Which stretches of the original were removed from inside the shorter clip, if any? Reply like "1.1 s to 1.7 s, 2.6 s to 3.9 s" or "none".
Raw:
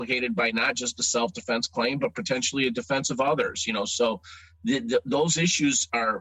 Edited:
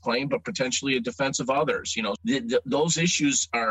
3.9 s to 4.6 s